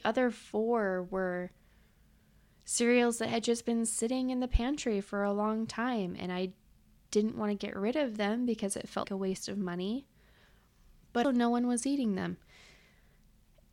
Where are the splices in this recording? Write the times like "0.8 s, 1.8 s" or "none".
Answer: 9.0 s, 11.2 s